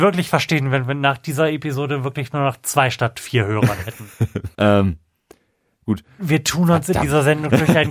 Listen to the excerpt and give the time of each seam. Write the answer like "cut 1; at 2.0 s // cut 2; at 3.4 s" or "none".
cut 1; at 4.5 s // cut 2; at 6.2 s